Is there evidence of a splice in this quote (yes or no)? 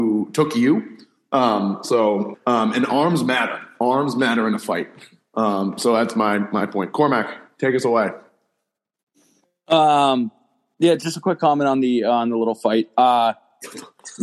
yes